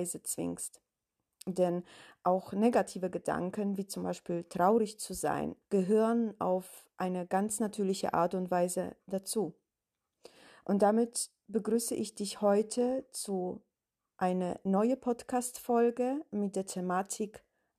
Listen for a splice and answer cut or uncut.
cut